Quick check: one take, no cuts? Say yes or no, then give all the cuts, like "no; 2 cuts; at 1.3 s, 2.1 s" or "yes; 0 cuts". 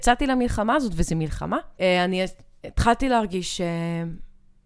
no; 1 cut; at 1.8 s